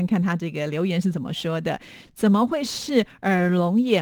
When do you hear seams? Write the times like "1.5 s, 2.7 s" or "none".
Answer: 2.1 s